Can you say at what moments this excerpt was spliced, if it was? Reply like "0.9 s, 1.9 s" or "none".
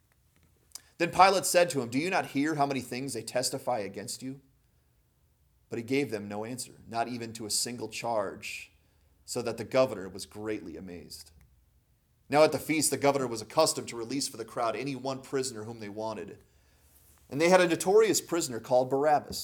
none

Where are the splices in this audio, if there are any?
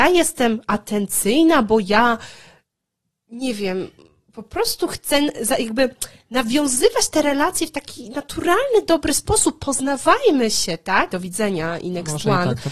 11.1 s

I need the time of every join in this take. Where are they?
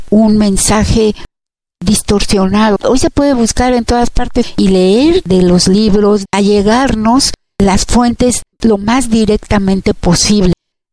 2.8 s, 6.3 s, 8.5 s

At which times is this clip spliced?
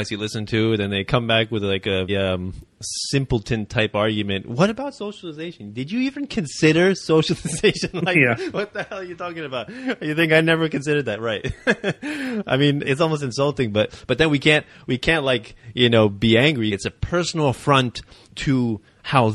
2.1 s, 12.8 s, 16.7 s

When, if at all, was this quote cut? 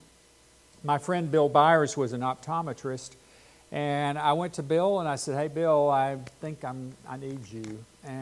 none

